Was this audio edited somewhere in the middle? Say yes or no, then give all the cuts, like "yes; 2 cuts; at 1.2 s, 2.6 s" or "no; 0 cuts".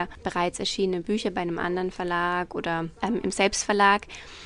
no; 0 cuts